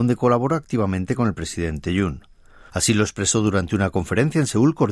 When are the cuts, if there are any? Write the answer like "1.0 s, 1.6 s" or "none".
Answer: 2.7 s